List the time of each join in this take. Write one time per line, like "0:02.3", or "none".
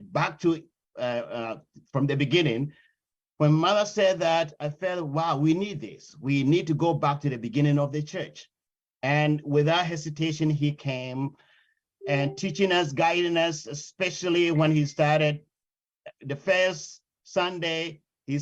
none